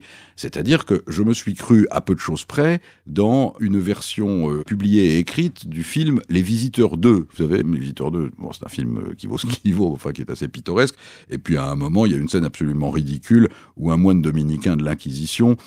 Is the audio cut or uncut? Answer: cut